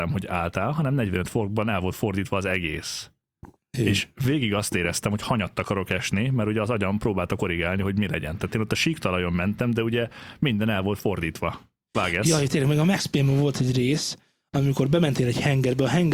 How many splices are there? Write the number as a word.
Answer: zero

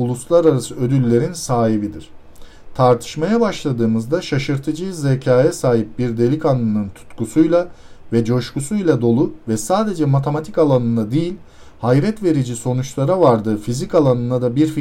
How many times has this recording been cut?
zero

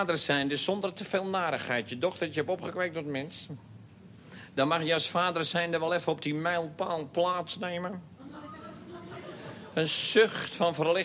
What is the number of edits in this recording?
zero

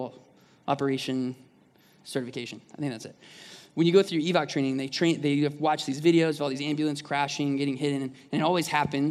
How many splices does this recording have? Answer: zero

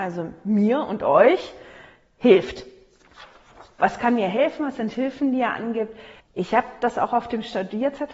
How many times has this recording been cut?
one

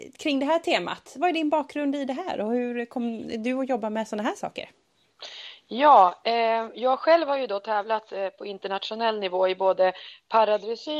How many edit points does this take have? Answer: zero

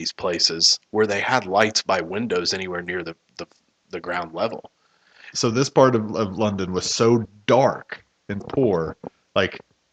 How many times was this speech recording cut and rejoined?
two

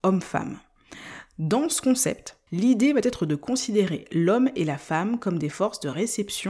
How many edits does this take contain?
one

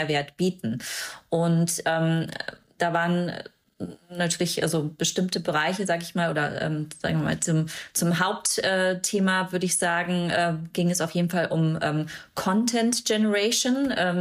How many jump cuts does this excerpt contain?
zero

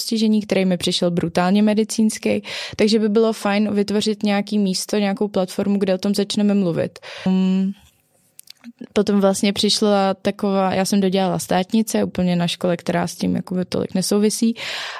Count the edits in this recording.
one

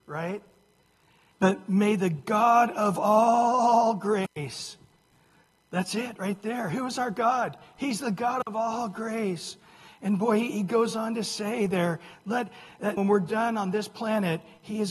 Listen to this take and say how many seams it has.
two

